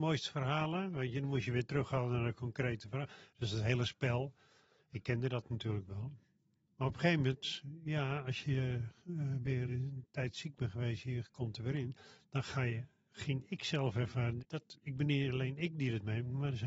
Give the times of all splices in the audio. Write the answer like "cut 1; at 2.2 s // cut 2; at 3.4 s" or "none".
cut 1; at 9.7 s // cut 2; at 14.4 s